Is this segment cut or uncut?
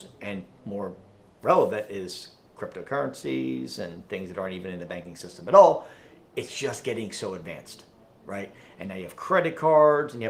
uncut